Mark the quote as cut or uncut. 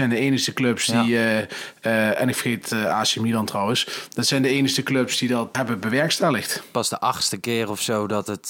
cut